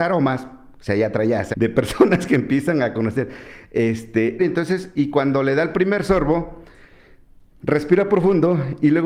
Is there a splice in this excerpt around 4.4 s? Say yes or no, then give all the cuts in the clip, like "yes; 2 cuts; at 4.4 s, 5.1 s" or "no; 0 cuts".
yes; 2 cuts; at 1.5 s, 4.4 s